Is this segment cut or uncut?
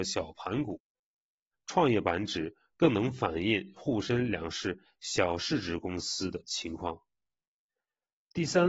cut